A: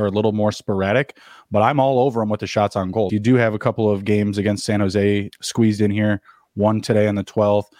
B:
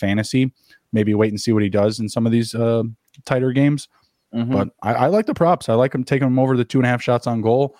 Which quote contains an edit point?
A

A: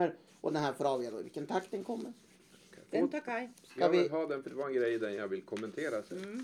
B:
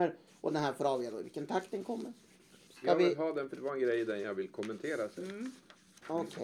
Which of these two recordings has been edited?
B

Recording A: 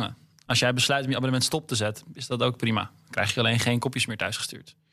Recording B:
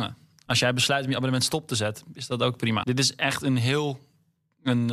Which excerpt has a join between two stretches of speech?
B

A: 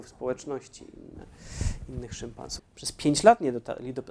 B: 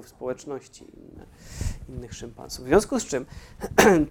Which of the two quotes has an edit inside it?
A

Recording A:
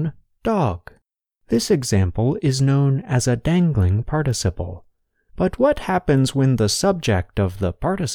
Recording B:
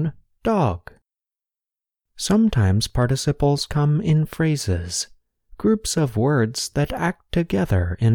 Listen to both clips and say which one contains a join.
A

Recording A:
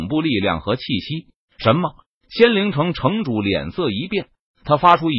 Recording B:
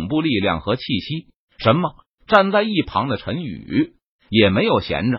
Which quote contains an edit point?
B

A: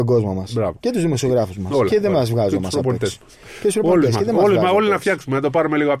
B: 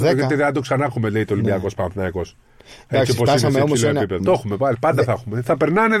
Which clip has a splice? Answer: B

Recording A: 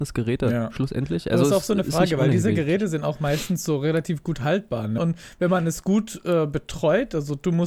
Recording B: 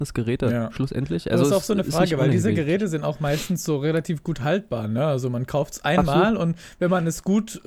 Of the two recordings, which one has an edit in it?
A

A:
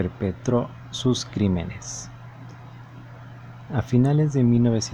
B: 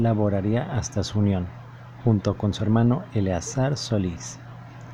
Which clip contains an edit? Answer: A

